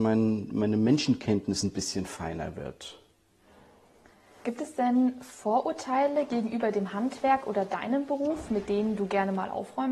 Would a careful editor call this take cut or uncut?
uncut